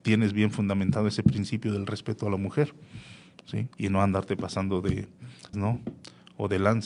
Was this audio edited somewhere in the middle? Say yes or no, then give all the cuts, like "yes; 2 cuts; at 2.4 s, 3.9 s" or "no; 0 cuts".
yes; 2 cuts; at 3.7 s, 5.5 s